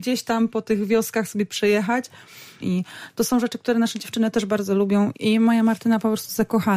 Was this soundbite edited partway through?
yes; 2 cuts; at 2.6 s, 5.1 s

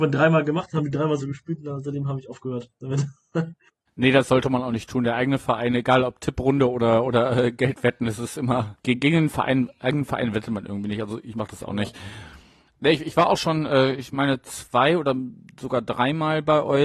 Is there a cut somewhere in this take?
no; 0 cuts

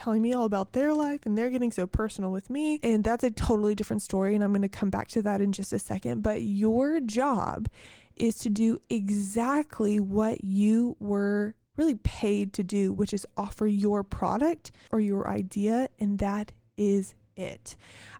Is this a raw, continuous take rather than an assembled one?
no; 1 cut; at 14.9 s

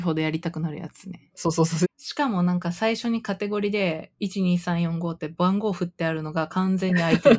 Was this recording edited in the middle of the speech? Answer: yes; 1 cut; at 1.8 s

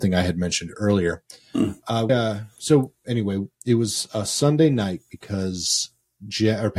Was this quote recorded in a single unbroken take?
no; 2 cuts; at 2.1 s, 3.5 s

